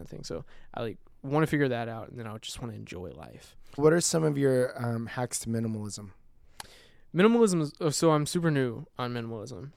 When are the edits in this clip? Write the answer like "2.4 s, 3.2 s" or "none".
3.8 s